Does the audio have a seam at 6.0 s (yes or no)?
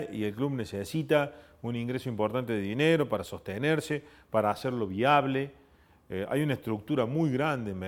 no